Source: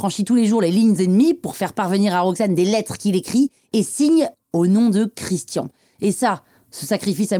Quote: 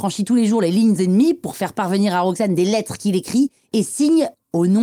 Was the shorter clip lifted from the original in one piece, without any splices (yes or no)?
yes